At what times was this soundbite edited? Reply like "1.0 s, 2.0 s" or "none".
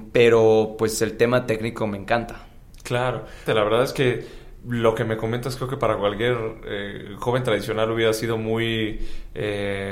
3.5 s